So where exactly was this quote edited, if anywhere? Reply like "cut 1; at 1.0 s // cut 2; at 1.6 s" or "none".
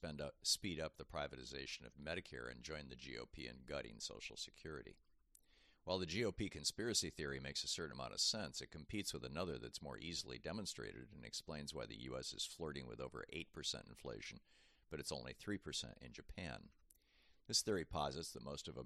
none